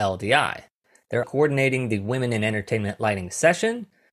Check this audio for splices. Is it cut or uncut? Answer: cut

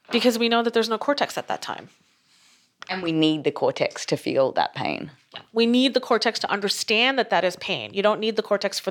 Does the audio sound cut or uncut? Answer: uncut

